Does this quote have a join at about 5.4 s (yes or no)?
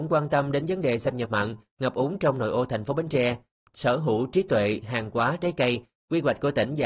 no